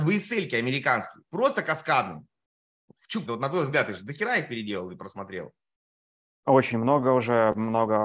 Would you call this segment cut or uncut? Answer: cut